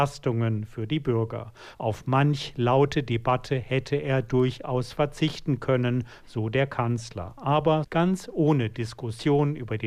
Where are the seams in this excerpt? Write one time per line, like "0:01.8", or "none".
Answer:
0:01.7
0:07.8